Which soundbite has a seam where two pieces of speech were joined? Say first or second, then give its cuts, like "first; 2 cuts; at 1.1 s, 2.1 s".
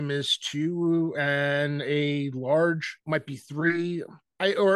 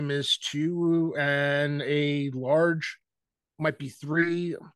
first; 1 cut; at 3.0 s